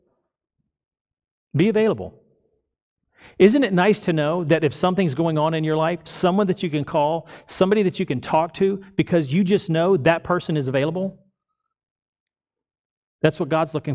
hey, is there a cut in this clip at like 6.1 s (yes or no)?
yes